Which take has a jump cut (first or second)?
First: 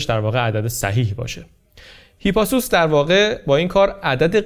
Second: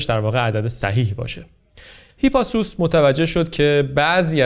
second